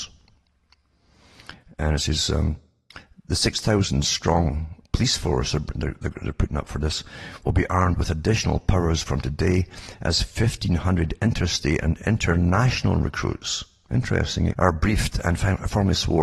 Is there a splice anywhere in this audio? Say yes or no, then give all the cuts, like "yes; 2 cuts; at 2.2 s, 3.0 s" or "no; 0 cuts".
yes; 1 cut; at 14.5 s